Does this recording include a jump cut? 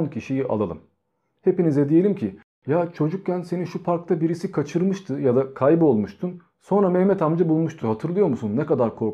no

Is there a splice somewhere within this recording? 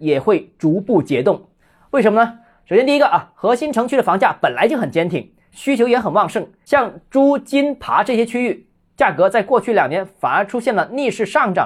no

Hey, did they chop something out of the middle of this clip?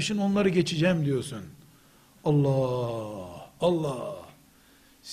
no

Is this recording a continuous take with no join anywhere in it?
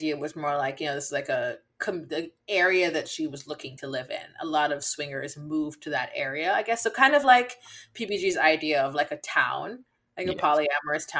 yes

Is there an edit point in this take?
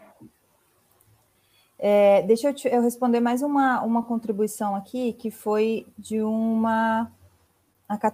no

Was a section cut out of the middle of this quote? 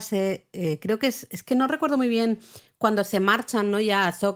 no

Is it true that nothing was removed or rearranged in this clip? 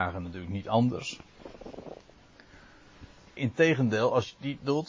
no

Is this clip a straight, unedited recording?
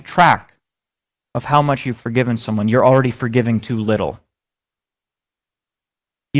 yes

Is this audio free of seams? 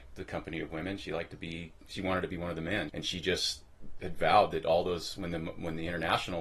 no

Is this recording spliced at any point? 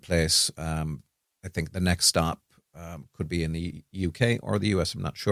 no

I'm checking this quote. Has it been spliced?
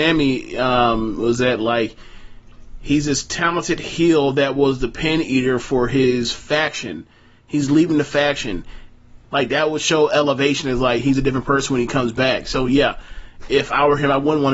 yes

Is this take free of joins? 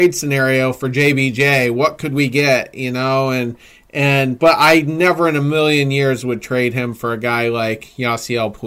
yes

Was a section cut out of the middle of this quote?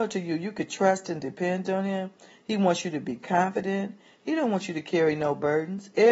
no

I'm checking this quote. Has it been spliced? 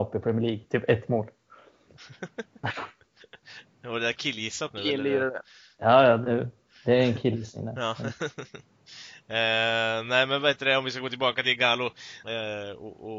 yes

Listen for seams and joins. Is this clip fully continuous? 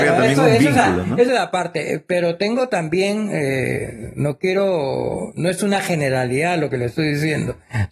yes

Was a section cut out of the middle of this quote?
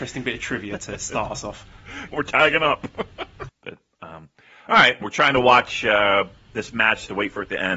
yes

